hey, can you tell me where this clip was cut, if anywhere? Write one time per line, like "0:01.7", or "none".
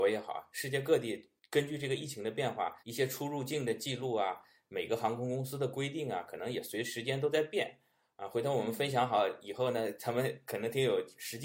0:02.8